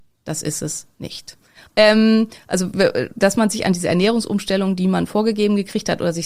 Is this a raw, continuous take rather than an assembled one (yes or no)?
no